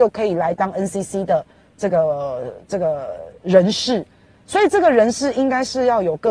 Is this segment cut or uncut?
uncut